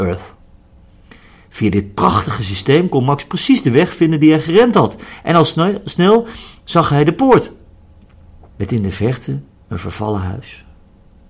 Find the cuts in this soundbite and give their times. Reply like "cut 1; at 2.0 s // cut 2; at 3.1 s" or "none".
cut 1; at 8.5 s